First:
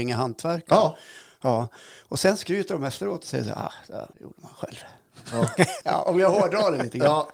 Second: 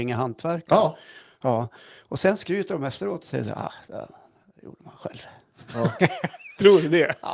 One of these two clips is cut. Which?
first; 2 cuts; at 4.1 s, 5.8 s

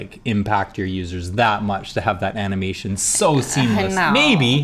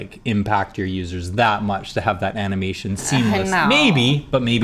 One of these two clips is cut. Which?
second; 1 cut; at 3.0 s

